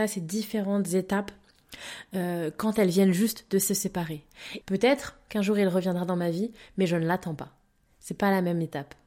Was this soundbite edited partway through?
yes; 1 cut; at 4.6 s

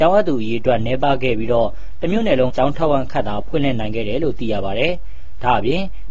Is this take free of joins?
no; 1 cut; at 2.5 s

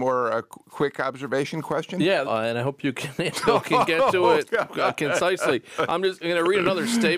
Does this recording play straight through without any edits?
no; 1 cut; at 2.2 s

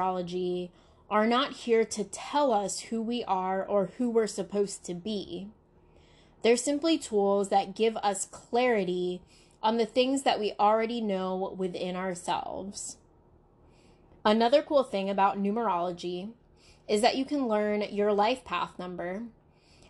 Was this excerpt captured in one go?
no; 1 cut; at 14.2 s

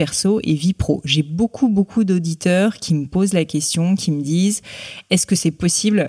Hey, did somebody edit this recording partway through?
no; 0 cuts

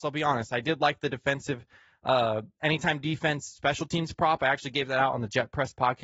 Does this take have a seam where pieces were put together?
no; 0 cuts

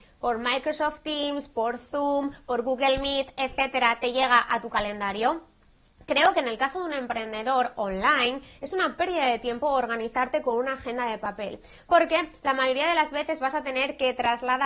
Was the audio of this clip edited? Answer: no; 0 cuts

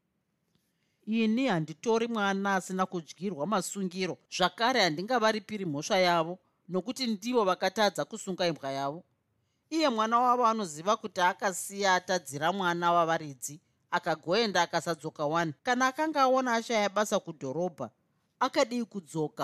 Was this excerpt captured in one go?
no; 2 cuts; at 4.3 s, 15.6 s

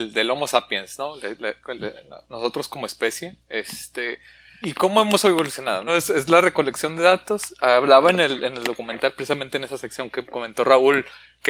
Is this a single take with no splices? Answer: no; 2 cuts; at 4.6 s, 5.9 s

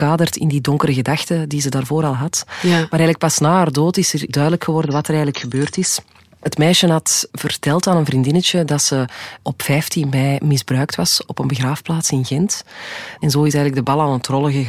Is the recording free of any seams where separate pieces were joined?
no; 1 cut; at 13.2 s

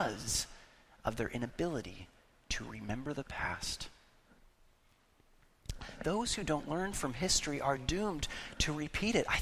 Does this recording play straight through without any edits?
no; 1 cut; at 6.0 s

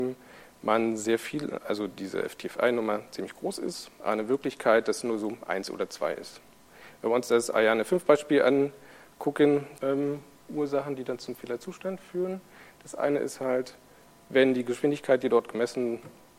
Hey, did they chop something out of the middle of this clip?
yes; 1 cut; at 9.8 s

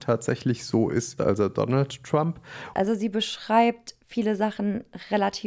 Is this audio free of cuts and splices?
no; 2 cuts; at 1.2 s, 2.7 s

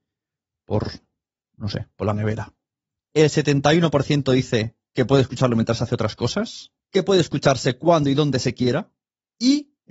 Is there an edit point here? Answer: no; 0 cuts

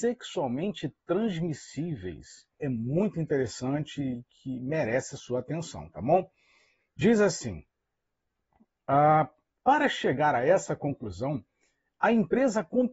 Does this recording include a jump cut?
yes; 1 cut; at 2.6 s

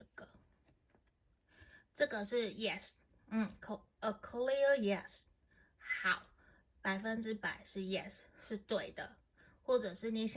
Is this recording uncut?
yes; 0 cuts

